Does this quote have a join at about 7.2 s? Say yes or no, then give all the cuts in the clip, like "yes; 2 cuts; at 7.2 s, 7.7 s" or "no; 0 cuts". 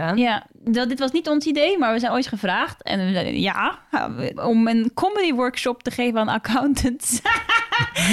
no; 1 cut; at 4.4 s